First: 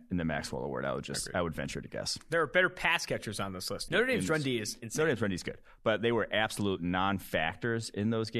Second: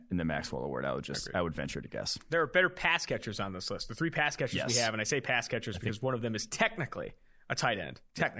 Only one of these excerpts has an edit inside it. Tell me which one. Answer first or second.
first